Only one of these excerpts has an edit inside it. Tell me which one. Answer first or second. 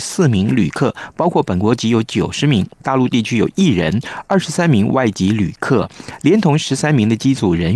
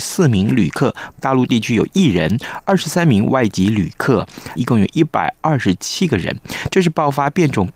second